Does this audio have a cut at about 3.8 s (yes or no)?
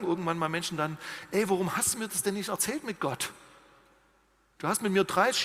no